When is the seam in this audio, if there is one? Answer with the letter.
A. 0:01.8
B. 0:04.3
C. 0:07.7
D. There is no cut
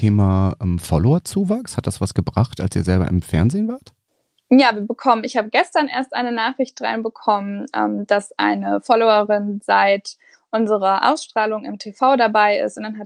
D